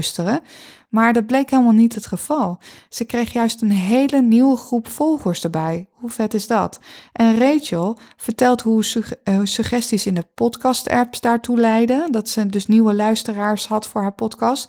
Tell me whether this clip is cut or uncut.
uncut